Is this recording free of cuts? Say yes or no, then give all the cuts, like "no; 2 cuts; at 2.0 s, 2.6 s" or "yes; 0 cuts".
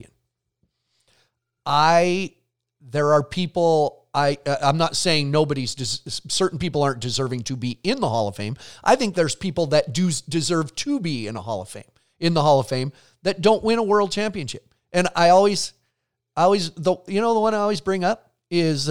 yes; 0 cuts